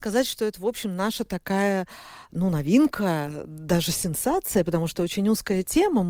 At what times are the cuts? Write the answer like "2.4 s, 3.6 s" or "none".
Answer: none